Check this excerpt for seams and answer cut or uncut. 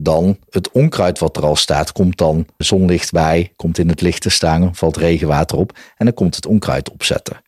cut